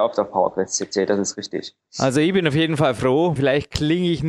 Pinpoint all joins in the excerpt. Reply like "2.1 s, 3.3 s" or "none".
3.4 s